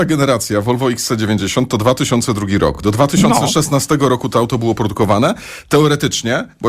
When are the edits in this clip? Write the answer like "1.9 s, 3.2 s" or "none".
none